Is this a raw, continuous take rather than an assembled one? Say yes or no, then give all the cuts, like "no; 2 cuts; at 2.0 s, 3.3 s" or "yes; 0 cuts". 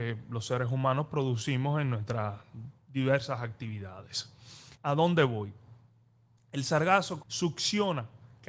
no; 2 cuts; at 4.8 s, 7.2 s